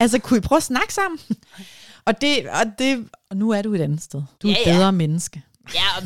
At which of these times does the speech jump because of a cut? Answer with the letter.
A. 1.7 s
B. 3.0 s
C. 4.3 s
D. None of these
C